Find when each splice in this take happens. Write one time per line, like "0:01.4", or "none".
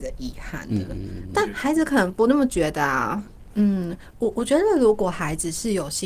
0:03.5